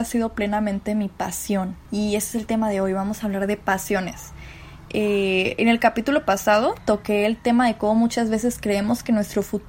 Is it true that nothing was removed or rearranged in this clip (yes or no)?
no